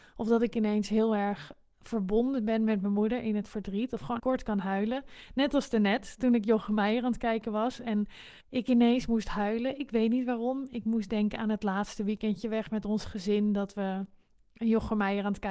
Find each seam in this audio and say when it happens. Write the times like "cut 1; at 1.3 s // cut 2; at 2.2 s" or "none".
cut 1; at 4.2 s // cut 2; at 8.4 s